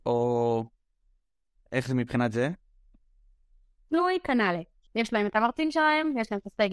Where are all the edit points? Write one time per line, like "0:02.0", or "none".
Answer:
0:04.9